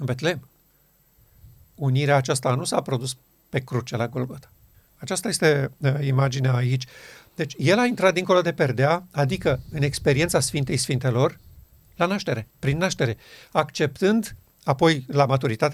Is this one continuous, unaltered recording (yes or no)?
no